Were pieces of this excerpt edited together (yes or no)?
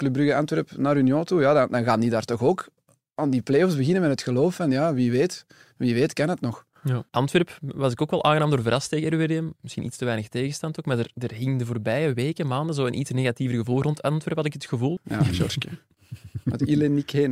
yes